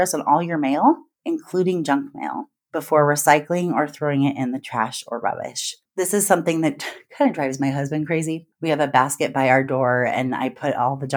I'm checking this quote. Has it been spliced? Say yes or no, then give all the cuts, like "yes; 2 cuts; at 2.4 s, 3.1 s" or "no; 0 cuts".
no; 0 cuts